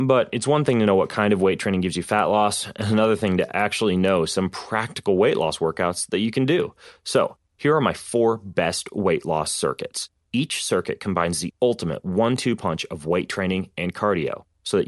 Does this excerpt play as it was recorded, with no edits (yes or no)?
yes